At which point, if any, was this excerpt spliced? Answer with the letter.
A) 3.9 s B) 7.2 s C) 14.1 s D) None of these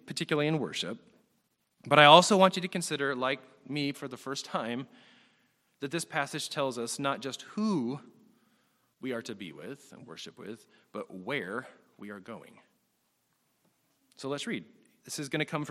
A